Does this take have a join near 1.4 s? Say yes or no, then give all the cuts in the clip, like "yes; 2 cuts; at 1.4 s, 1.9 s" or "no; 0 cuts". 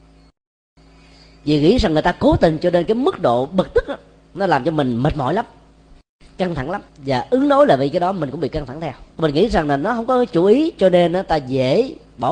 no; 2 cuts; at 6.9 s, 9.1 s